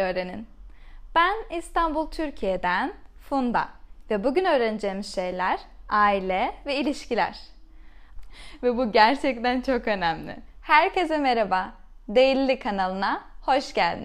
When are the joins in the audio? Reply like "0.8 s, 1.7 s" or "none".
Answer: 8.2 s, 10.6 s